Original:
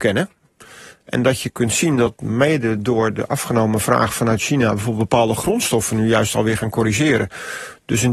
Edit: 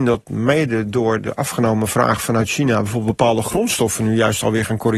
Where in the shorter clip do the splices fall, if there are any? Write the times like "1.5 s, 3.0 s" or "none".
none